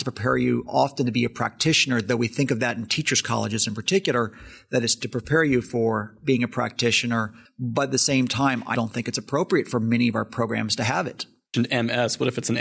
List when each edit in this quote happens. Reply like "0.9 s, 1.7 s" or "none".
7.5 s, 8.7 s

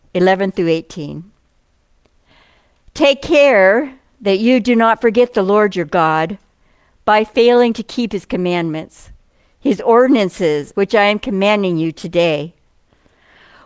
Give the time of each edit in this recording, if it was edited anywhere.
10.7 s

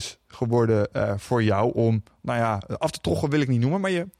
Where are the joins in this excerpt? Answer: none

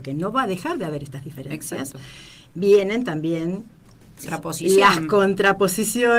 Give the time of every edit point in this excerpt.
2.5 s, 4.3 s

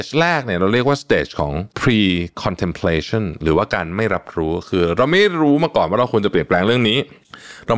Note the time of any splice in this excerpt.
1.7 s

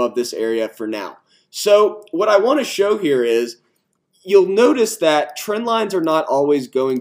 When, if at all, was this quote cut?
none

